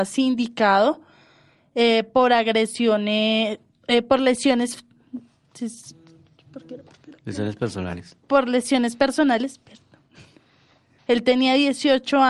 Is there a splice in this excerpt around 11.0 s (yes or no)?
yes